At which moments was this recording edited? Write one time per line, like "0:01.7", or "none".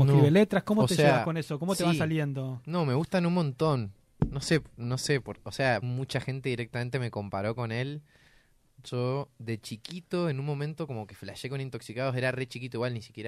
0:05.8